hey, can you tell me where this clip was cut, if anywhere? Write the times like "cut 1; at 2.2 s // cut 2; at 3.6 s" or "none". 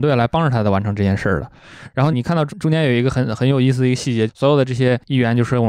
cut 1; at 2.1 s // cut 2; at 4.3 s